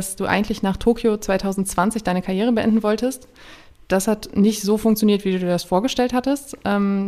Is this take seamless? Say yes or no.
yes